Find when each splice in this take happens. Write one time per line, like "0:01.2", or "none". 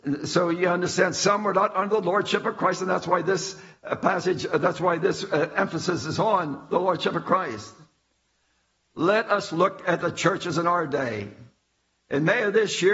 none